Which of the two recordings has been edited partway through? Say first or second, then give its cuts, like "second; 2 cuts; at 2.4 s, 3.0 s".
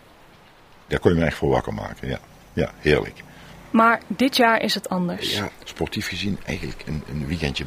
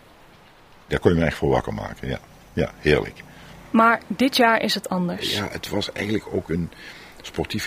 first; 1 cut; at 5.5 s